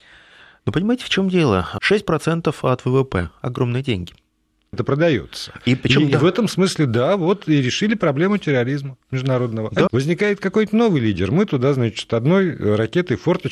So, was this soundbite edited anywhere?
yes; 3 cuts; at 1.8 s, 4.7 s, 9.9 s

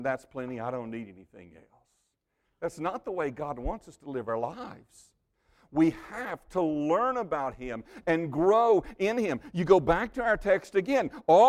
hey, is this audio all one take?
yes; 0 cuts

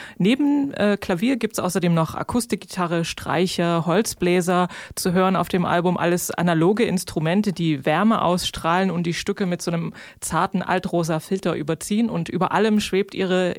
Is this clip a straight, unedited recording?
yes; 0 cuts

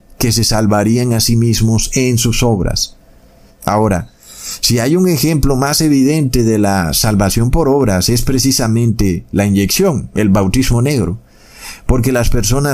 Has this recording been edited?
yes; 1 cut; at 3.5 s

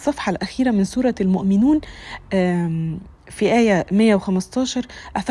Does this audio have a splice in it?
yes; 1 cut; at 3.1 s

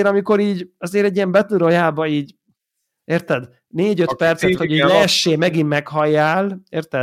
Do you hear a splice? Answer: yes; 1 cut; at 4.6 s

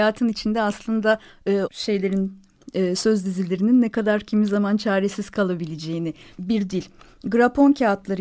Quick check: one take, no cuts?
no; 2 cuts; at 1.6 s, 6.4 s

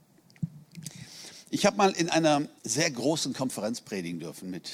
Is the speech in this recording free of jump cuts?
no; 1 cut; at 2.6 s

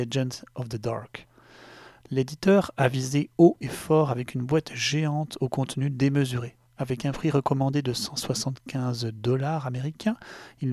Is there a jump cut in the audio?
no; 0 cuts

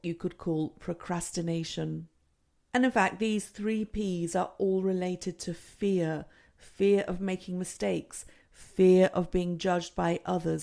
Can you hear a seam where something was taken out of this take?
no; 0 cuts

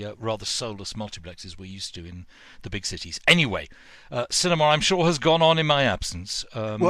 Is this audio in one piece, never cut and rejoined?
yes; 0 cuts

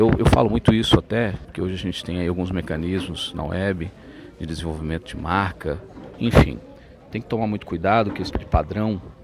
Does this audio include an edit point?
yes; 3 cuts; at 1.4 s, 6.1 s, 8.3 s

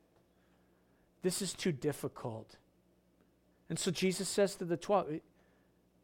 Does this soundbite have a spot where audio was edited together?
yes; 1 cut; at 3.5 s

